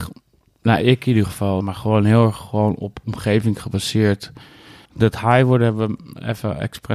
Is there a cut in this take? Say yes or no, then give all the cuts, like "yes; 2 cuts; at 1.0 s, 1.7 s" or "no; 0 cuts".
yes; 2 cuts; at 1.6 s, 4.9 s